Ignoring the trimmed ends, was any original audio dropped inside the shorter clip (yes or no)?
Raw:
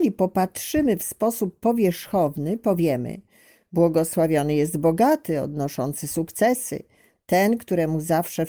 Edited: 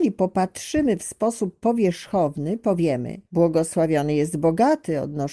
yes